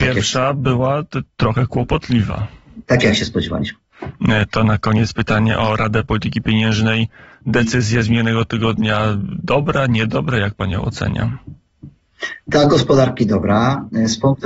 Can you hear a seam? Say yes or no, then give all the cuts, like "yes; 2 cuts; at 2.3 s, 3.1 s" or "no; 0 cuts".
yes; 1 cut; at 2.8 s